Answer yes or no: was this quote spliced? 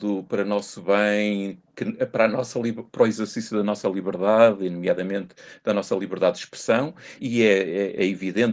yes